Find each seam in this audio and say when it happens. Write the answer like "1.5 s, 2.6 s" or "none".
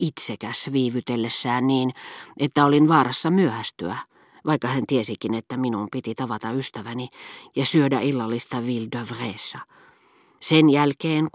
10.4 s